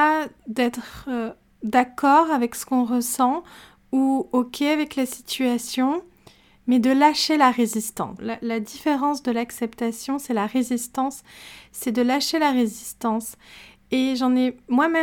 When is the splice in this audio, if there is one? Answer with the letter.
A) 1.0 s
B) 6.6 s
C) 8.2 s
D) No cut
C